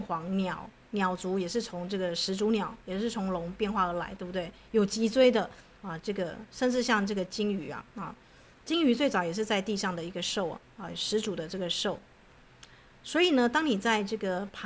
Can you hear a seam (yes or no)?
no